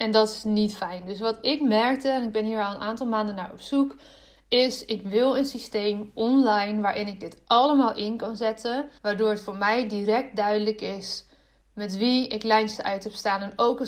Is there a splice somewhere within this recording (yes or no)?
yes